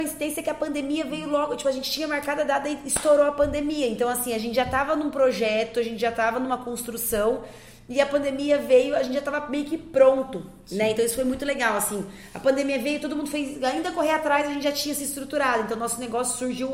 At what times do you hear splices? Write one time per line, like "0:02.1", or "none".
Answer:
none